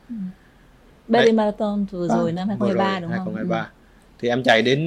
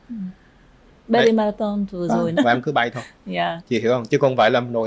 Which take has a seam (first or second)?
second